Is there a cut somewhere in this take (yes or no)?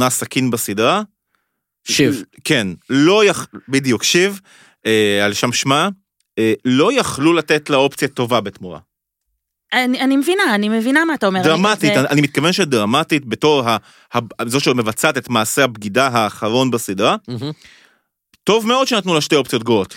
no